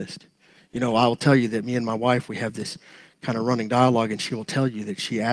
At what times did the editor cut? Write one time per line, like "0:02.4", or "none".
none